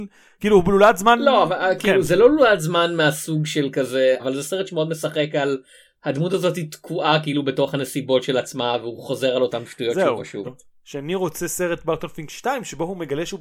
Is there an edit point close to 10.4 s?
yes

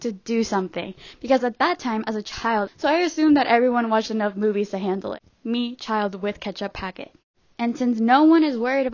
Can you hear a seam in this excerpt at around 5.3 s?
yes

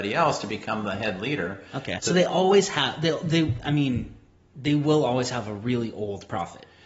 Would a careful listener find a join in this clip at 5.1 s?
no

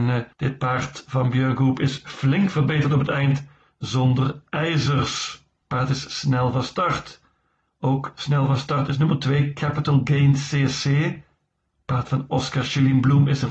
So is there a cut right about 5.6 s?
yes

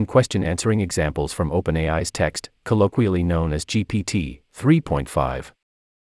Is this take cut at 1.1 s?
no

